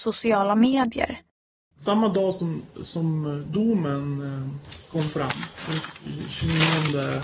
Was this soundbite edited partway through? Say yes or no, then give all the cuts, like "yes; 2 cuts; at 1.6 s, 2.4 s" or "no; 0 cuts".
yes; 1 cut; at 1.7 s